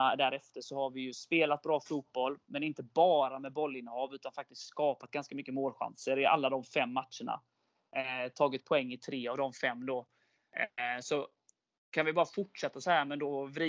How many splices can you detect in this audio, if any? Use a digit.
0